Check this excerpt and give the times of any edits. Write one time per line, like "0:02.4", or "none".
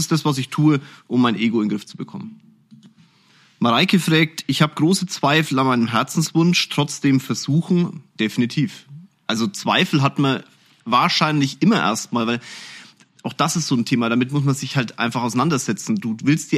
none

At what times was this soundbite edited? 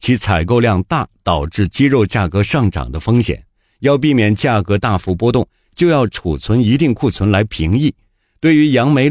none

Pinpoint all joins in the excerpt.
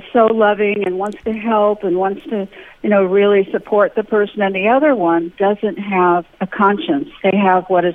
0:05.3

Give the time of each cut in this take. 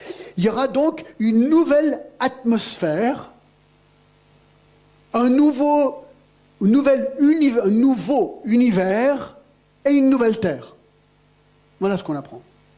none

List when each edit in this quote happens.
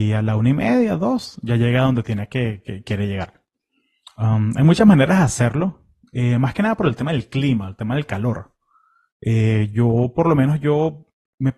none

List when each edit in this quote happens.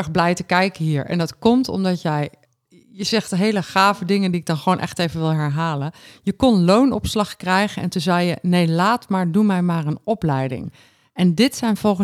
none

